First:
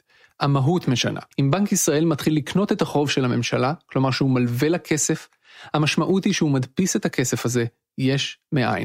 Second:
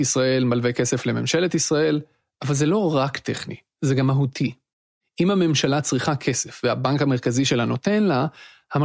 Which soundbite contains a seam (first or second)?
first